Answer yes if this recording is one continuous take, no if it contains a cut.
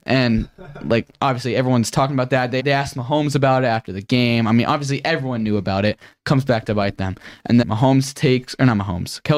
no